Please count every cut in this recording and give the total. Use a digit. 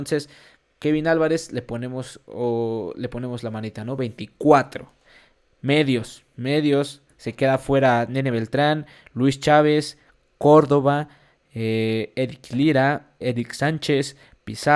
1